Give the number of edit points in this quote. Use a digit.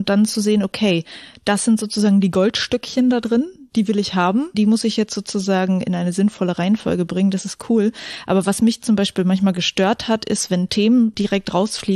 0